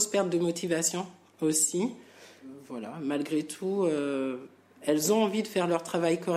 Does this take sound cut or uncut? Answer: uncut